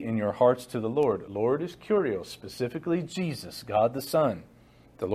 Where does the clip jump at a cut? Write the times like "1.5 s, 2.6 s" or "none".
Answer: none